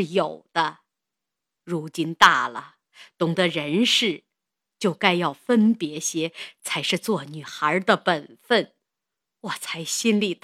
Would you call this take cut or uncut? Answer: uncut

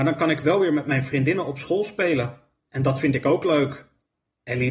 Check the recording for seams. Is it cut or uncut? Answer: uncut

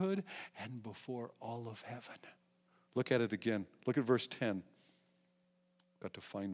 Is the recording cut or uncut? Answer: uncut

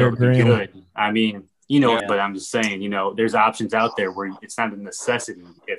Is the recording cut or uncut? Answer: cut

